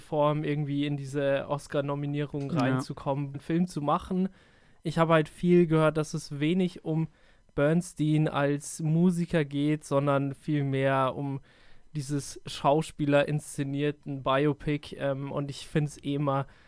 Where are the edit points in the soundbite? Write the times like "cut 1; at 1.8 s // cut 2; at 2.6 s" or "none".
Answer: cut 1; at 3.3 s